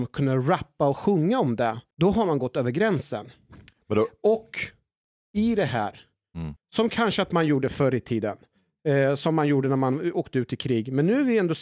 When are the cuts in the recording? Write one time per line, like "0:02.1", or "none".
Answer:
0:01.9
0:06.6